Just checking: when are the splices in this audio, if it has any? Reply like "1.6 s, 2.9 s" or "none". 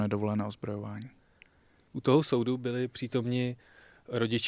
none